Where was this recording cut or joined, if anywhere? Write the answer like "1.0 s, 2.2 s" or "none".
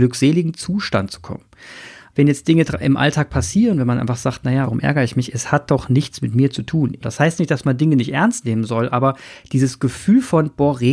2.1 s, 4.6 s, 7.0 s